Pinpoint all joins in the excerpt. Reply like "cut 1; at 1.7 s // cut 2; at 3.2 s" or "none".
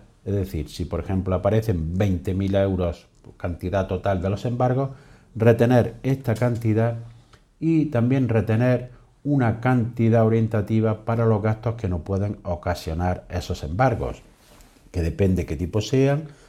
none